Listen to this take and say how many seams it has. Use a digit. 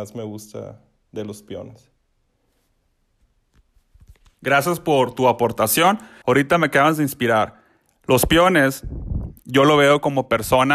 1